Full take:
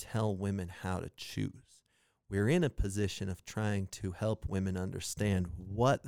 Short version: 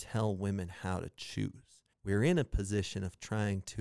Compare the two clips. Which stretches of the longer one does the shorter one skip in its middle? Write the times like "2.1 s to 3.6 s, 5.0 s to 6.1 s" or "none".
1.9 s to 2.2 s